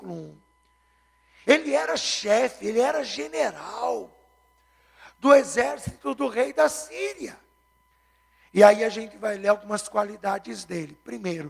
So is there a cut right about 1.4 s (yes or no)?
yes